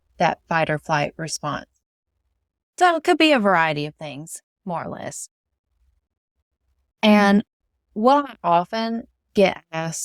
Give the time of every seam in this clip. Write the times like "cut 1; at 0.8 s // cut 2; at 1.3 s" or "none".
none